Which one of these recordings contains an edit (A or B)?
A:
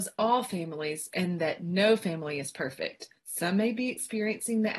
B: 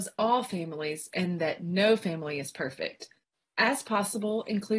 A